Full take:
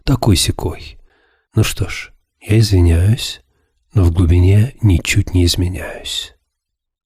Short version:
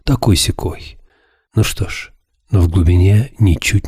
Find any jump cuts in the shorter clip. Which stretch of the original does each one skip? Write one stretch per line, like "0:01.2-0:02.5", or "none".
0:02.3-0:03.7

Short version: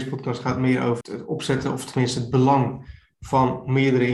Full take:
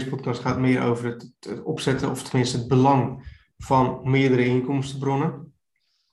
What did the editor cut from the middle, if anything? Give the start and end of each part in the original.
0:01.0-0:01.4

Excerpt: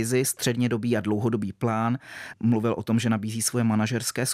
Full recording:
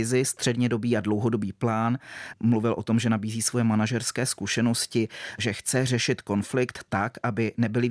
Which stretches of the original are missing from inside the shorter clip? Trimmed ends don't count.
none

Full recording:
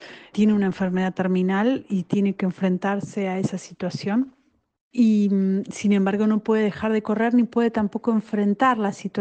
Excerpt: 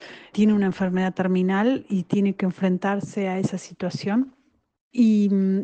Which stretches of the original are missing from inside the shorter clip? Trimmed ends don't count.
none

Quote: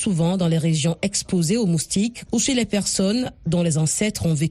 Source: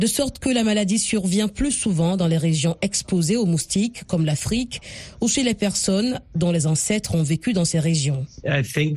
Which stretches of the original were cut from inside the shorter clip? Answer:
0:04.1-0:05.2

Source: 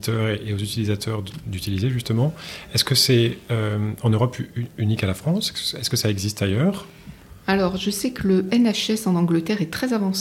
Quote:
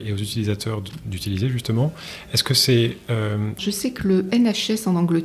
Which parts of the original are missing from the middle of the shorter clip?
0:04.0-0:07.8

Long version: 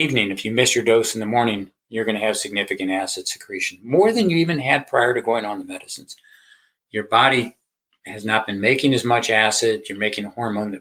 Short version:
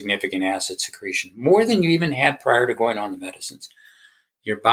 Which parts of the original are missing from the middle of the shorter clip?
none

